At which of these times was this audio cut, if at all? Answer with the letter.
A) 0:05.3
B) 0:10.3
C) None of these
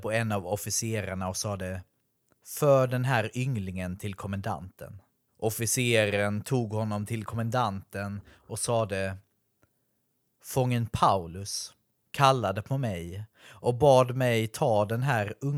A